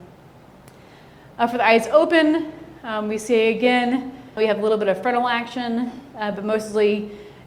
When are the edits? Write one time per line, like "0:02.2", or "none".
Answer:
0:04.4